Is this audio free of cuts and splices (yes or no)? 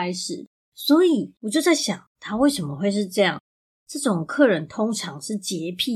no